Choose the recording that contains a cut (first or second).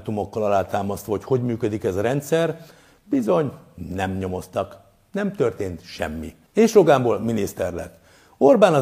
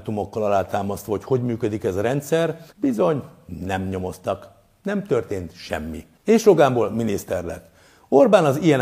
second